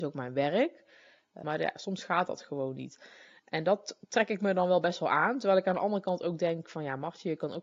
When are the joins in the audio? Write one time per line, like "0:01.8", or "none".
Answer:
0:01.4